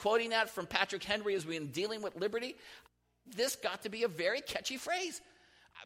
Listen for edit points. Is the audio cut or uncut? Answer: uncut